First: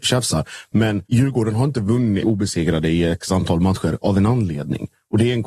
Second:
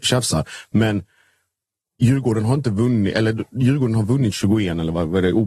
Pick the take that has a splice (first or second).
first